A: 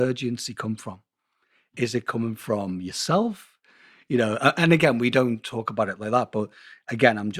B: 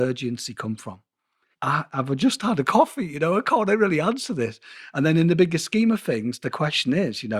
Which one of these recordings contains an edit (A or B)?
B